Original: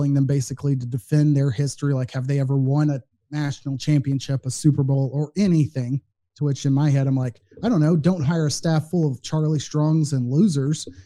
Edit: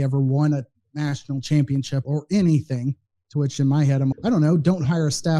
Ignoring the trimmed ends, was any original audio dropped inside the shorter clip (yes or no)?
yes